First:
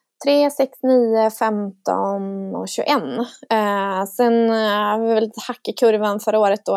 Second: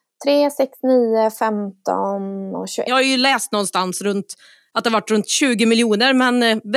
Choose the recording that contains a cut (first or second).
second